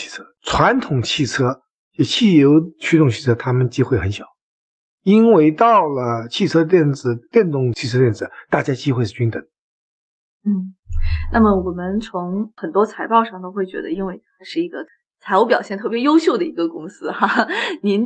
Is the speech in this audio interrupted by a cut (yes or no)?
no